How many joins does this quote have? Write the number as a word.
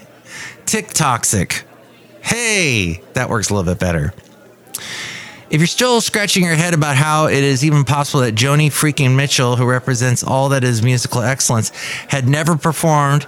zero